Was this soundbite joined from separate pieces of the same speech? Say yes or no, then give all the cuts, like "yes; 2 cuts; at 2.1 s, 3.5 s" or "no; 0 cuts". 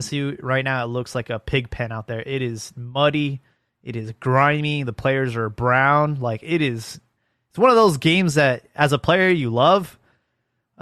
no; 0 cuts